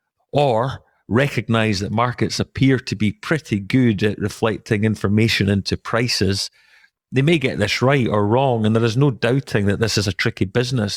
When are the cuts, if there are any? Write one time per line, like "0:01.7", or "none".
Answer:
0:07.0